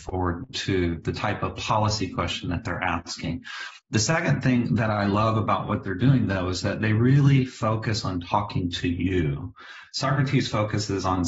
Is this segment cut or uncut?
cut